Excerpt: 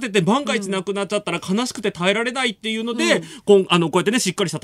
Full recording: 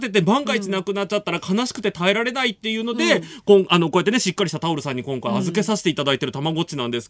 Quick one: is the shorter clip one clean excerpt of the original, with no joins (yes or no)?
yes